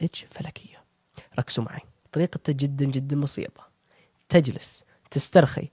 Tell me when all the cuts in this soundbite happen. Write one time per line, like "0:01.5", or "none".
none

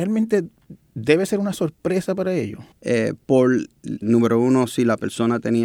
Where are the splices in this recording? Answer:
0:02.7
0:04.0

